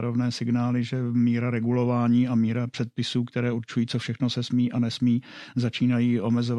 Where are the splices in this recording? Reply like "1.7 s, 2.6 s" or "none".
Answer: none